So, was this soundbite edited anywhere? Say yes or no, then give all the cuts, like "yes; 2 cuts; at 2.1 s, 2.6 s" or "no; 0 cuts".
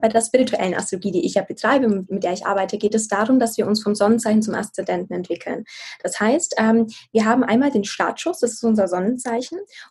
no; 0 cuts